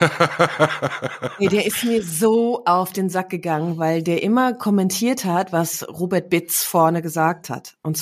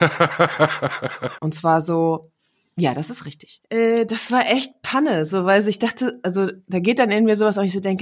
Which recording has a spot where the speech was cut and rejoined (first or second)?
second